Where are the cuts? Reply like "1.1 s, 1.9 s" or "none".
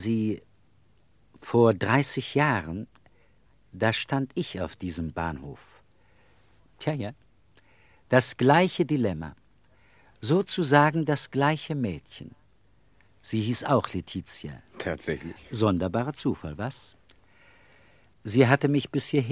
6.6 s